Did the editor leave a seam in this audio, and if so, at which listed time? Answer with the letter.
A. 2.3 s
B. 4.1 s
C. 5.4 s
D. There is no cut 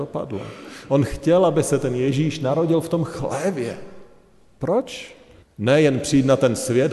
C